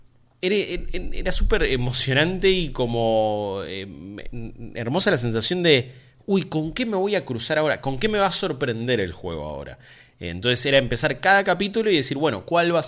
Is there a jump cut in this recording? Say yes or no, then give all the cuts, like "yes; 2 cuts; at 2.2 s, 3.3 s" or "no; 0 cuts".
no; 0 cuts